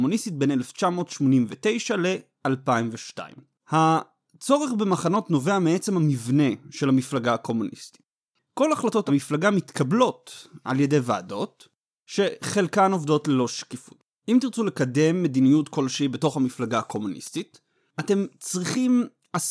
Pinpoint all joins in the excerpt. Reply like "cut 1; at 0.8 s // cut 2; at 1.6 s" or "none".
cut 1; at 3.6 s